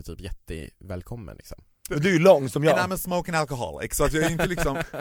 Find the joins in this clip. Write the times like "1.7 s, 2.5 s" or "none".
1.9 s